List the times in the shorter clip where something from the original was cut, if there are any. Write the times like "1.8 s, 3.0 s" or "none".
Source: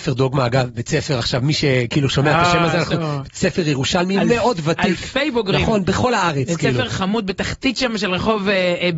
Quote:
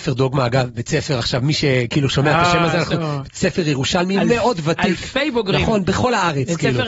none